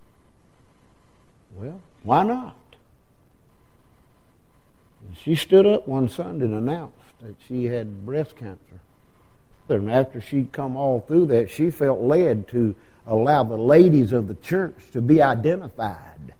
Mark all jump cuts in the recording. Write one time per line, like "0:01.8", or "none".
0:09.7